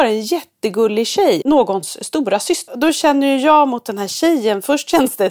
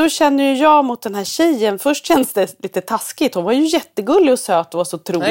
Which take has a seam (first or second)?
first